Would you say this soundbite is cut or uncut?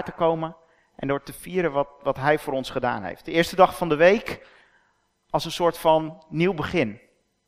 uncut